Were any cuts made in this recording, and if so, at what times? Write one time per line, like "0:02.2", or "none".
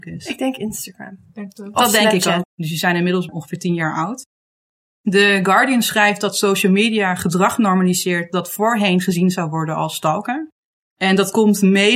0:02.4